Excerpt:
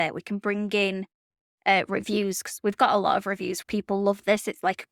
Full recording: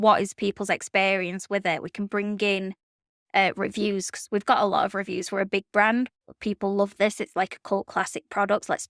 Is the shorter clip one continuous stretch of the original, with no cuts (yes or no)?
no